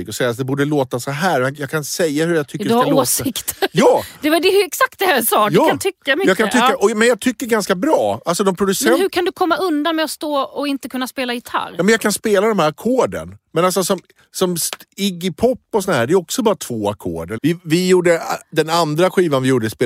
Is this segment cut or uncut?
cut